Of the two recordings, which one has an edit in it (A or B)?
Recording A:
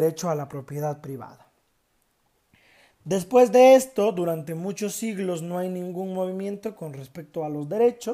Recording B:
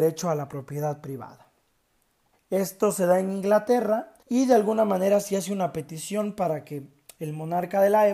B